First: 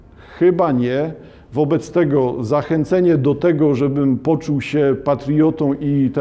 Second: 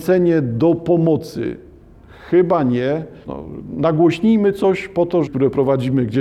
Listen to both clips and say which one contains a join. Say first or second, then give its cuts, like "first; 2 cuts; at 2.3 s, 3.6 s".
second; 2 cuts; at 3.2 s, 5.3 s